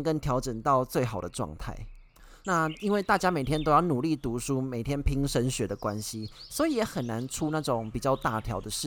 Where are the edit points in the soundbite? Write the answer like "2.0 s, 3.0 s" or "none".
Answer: 2.4 s